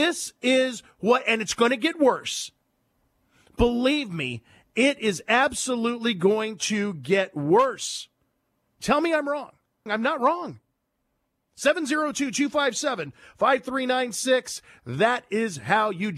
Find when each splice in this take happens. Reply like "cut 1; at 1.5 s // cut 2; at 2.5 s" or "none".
cut 1; at 9.9 s

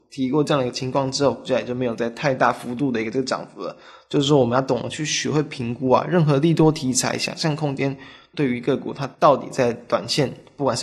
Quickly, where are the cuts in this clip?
none

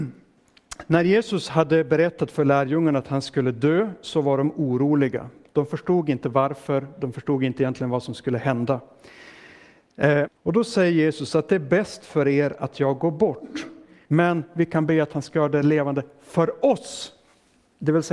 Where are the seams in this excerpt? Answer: cut 1; at 10.3 s // cut 2; at 14.1 s

